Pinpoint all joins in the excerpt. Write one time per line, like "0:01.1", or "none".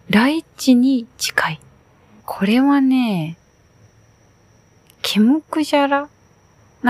0:02.2
0:04.8